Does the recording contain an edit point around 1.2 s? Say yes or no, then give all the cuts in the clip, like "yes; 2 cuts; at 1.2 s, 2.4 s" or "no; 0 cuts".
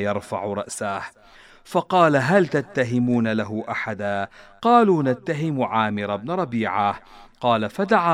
no; 0 cuts